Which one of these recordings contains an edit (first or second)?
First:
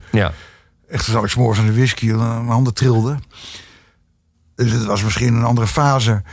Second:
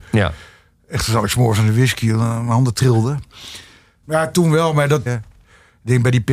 second